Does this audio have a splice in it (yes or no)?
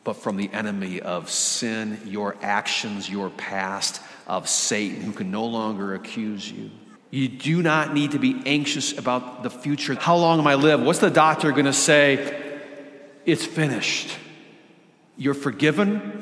yes